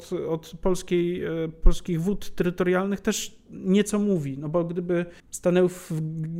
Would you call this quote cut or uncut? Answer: cut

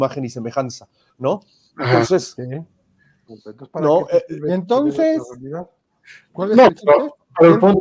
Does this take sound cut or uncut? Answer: cut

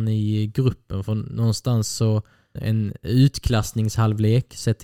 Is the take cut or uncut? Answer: cut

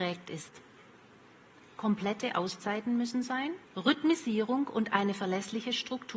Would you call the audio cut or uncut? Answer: cut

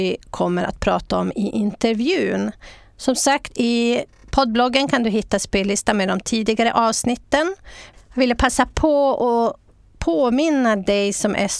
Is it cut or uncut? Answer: cut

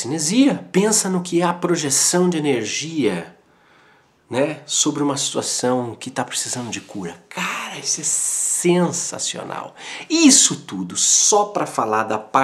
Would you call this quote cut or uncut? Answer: uncut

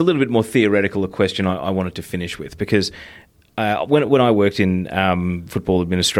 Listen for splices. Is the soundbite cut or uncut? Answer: uncut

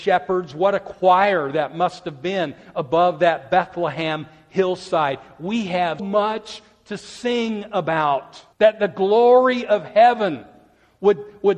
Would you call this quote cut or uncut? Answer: cut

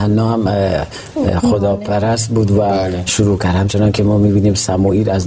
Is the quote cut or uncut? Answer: cut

